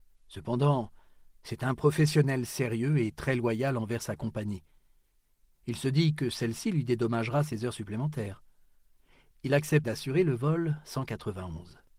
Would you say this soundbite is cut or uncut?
cut